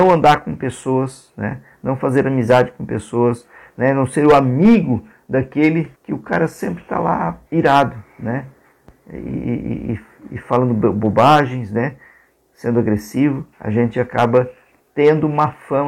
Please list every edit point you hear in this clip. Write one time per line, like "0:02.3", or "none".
0:05.9
0:07.5
0:13.5

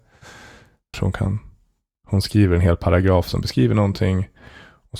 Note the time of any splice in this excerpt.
0:00.9

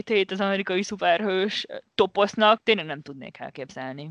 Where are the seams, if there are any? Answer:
0:02.6

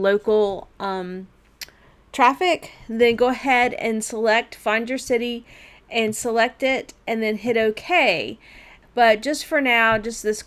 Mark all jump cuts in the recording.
0:08.8

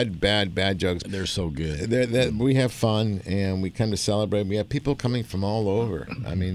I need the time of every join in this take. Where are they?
0:01.0

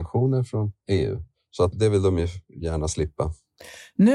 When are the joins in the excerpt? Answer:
0:01.7

